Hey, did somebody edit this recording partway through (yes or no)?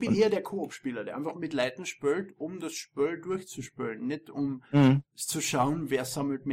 no